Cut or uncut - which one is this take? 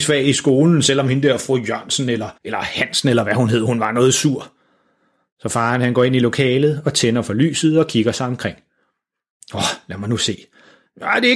cut